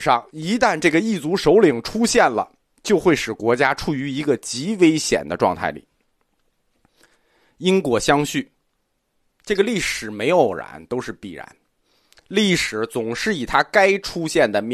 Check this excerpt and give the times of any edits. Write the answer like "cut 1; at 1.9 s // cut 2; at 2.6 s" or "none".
none